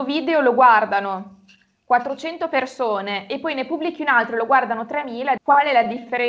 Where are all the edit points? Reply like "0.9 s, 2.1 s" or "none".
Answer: 5.4 s